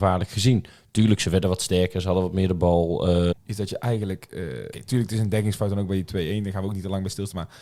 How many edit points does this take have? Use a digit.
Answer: 2